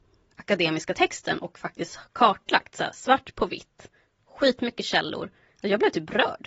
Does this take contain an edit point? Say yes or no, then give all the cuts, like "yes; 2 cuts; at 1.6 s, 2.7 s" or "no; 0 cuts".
yes; 1 cut; at 5.5 s